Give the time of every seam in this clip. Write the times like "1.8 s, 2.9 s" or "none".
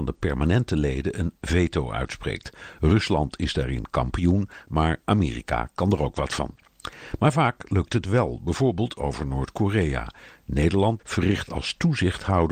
11.0 s